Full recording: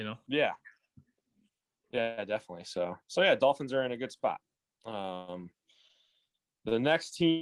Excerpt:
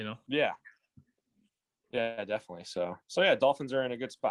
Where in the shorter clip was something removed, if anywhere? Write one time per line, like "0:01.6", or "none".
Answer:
none